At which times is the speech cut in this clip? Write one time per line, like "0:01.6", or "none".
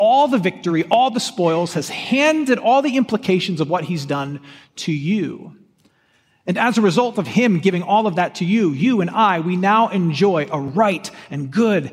none